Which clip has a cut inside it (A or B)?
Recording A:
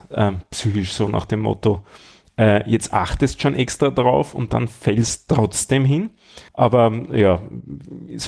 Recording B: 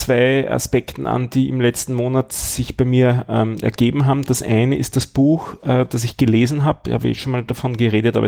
A